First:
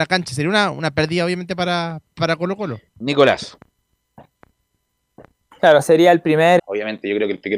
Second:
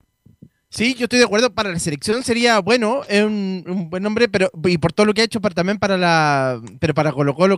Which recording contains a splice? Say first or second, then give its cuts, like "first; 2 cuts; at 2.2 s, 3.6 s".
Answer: first; 2 cuts; at 2.9 s, 6.6 s